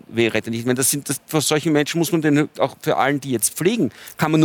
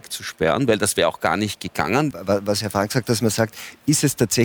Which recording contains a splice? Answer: second; 1 cut; at 2.1 s

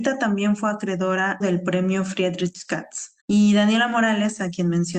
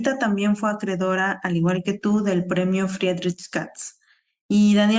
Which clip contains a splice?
first; 2 cuts; at 1.4 s, 3.2 s

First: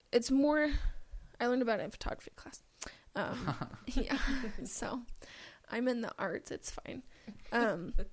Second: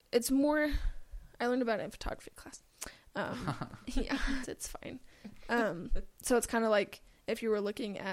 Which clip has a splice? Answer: second; 1 cut; at 4.4 s

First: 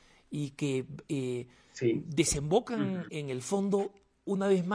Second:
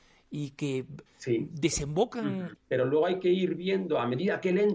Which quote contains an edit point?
second; 2 cuts; at 1.1 s, 2.5 s

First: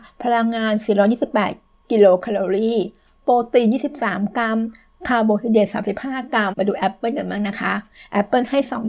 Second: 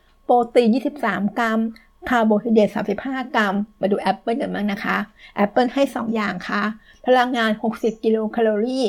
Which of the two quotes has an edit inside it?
first; 1 cut; at 6.5 s

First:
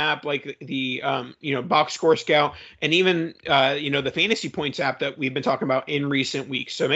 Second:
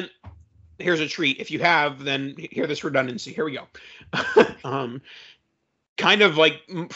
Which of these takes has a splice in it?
second; 1 cut; at 4.6 s

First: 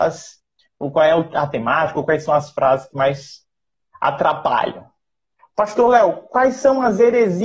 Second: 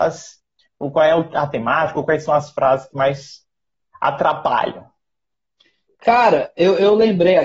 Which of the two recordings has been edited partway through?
first; 1 cut; at 5.4 s

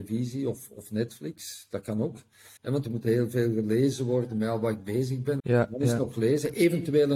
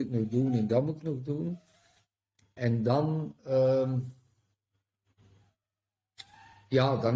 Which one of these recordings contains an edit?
first; 2 cuts; at 2.6 s, 5.4 s

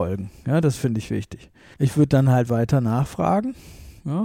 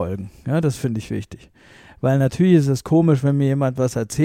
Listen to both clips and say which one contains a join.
first; 1 cut; at 1.7 s

